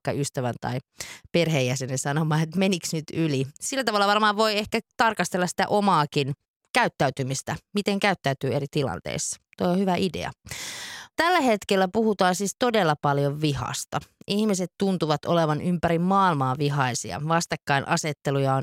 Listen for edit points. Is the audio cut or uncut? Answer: uncut